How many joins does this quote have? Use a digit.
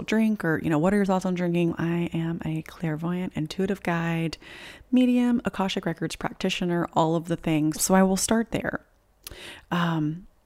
2